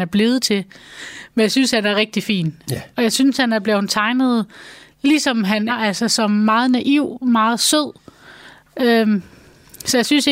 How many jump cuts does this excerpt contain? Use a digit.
1